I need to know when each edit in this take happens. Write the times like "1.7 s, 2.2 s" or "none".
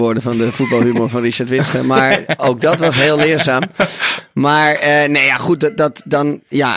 none